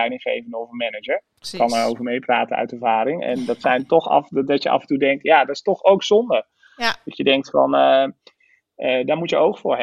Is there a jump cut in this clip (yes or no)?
no